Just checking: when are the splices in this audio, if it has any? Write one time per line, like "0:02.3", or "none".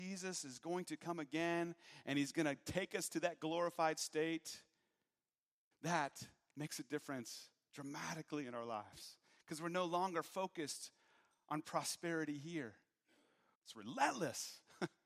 0:05.7
0:13.5